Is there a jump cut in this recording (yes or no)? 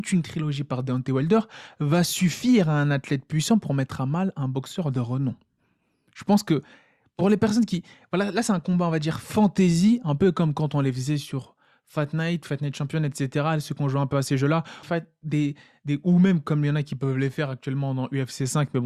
yes